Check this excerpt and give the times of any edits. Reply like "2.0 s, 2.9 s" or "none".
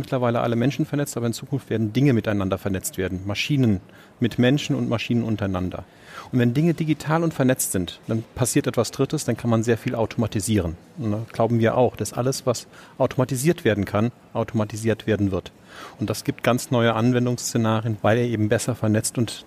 15.9 s, 18.0 s